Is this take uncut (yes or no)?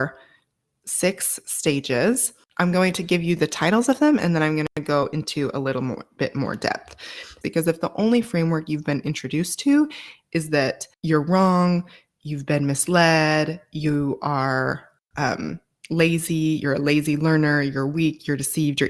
no